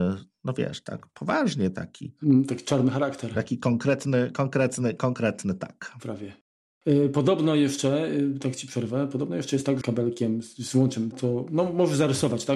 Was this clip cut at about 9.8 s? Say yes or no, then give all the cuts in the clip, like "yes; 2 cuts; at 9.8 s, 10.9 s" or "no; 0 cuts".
yes; 2 cuts; at 9.8 s, 11.1 s